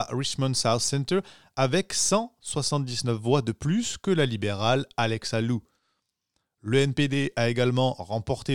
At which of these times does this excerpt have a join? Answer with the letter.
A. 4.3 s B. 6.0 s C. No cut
C